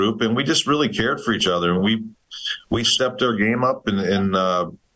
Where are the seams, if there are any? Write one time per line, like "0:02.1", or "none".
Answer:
none